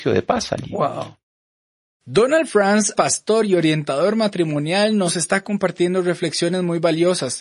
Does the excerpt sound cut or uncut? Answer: cut